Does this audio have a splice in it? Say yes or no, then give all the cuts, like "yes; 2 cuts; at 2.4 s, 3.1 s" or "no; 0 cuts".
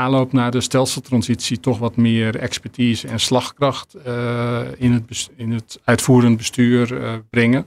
no; 0 cuts